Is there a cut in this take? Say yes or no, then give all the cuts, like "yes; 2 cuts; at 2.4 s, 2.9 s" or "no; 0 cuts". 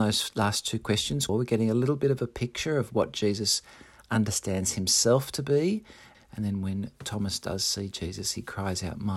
yes; 2 cuts; at 1.3 s, 6.1 s